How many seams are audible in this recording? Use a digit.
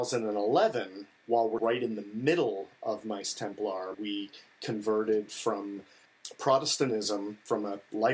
2